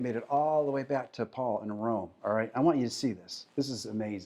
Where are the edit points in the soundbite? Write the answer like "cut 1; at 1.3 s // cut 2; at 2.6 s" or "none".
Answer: none